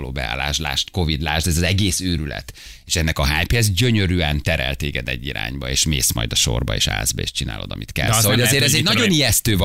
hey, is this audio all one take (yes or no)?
yes